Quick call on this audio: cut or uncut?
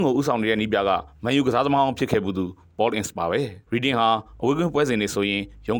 cut